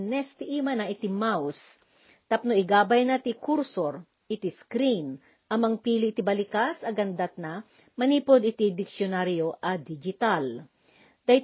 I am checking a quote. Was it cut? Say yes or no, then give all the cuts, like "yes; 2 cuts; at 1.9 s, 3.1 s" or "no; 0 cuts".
no; 0 cuts